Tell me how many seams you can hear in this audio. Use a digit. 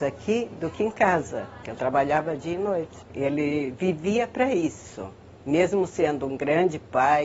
2